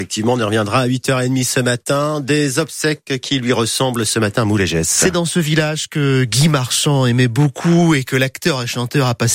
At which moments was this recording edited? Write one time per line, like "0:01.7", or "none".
none